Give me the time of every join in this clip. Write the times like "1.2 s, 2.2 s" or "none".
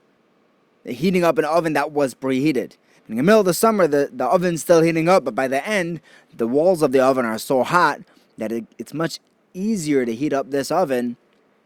3.0 s